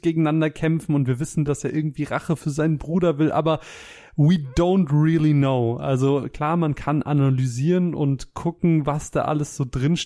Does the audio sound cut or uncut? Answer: uncut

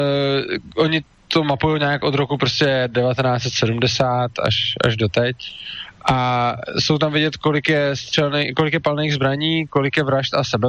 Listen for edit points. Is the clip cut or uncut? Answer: uncut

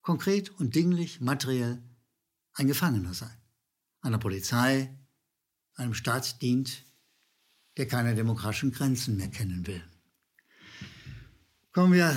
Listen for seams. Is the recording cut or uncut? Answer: cut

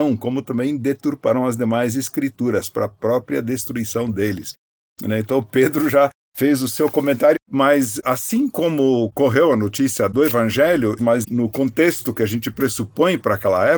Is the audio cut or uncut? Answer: cut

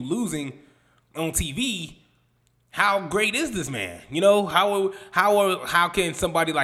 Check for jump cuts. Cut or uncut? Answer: uncut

